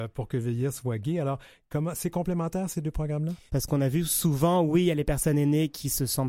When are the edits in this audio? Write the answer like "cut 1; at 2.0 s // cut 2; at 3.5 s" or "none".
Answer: cut 1; at 3.5 s

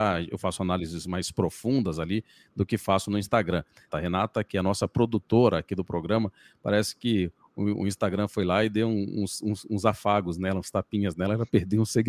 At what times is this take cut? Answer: cut 1; at 3.9 s

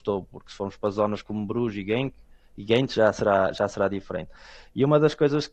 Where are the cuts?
none

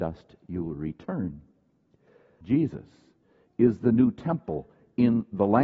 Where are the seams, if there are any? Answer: cut 1; at 2.4 s

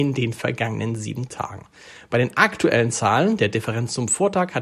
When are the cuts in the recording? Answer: none

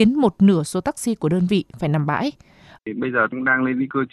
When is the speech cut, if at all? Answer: cut 1; at 2.8 s

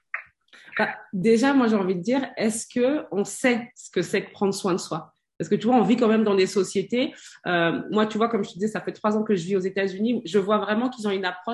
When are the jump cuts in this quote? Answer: none

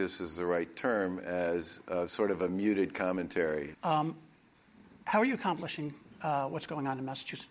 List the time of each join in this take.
cut 1; at 3.7 s

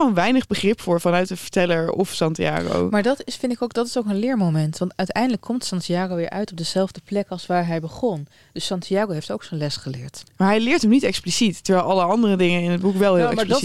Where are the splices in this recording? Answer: none

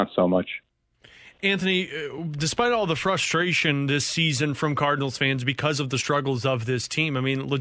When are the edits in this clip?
none

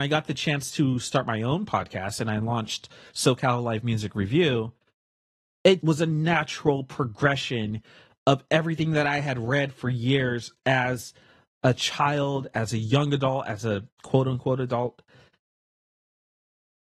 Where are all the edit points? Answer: cut 1; at 5.8 s

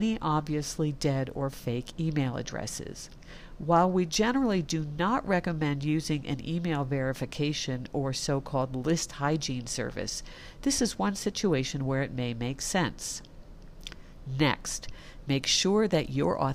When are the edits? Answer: none

